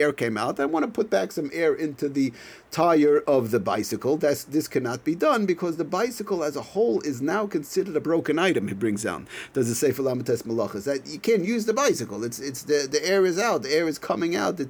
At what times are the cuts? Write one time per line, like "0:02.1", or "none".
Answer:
none